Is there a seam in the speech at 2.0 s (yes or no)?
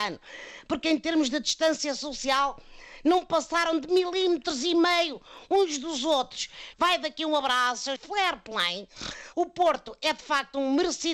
no